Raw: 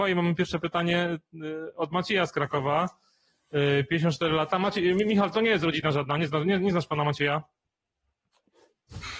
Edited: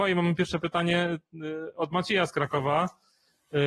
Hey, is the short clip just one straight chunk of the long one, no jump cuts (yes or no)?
yes